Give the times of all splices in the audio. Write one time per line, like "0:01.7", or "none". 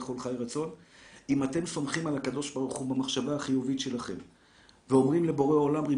none